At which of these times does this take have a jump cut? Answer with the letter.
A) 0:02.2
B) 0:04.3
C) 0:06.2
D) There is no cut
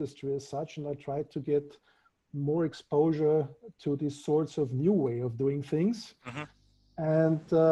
D